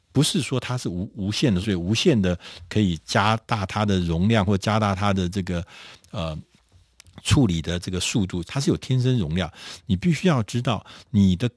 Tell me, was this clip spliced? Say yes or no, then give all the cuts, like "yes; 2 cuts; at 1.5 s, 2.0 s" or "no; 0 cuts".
yes; 2 cuts; at 1.6 s, 8.4 s